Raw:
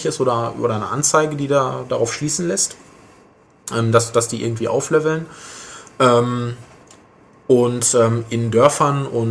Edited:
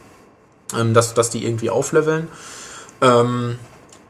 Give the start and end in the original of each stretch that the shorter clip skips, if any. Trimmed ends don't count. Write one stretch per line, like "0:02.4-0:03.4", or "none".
none